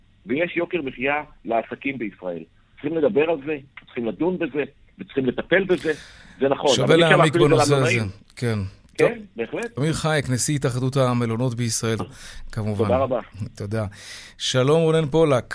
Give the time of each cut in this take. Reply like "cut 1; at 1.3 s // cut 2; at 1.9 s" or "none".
cut 1; at 9.8 s // cut 2; at 12.0 s